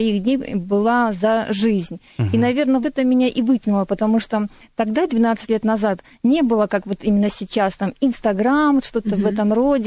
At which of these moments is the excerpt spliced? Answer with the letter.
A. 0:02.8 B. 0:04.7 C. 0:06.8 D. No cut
A